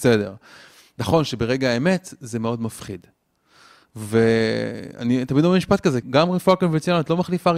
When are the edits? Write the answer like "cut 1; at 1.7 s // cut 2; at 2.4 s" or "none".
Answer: cut 1; at 6.0 s